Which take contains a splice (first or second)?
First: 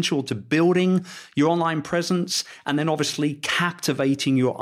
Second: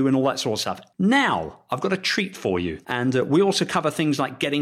second